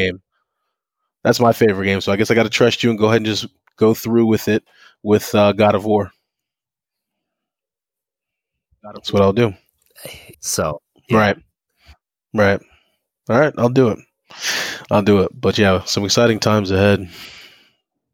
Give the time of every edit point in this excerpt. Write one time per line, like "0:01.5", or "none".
0:10.3